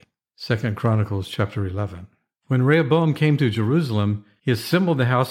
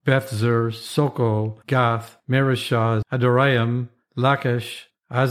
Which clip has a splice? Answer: second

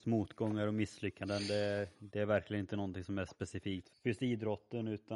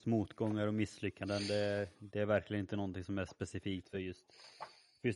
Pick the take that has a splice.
first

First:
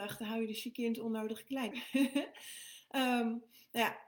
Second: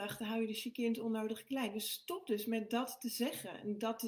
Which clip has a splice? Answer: first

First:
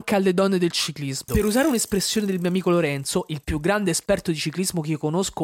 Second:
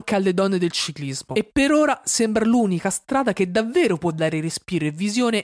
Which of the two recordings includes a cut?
first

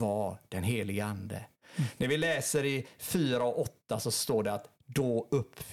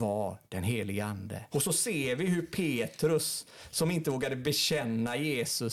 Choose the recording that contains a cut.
second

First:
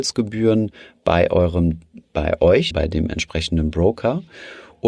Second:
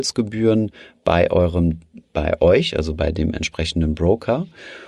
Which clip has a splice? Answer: first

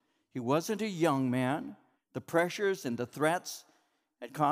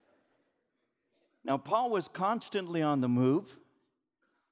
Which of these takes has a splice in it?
first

